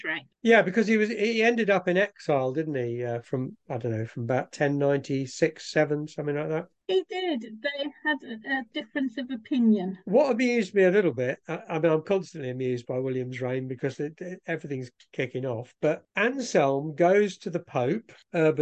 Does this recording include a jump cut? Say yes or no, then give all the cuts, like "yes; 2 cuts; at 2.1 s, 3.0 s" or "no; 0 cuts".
no; 0 cuts